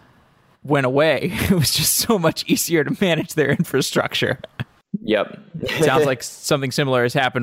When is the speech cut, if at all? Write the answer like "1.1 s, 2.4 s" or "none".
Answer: none